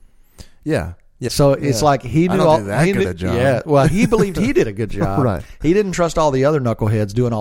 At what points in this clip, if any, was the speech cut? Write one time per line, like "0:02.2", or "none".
0:01.3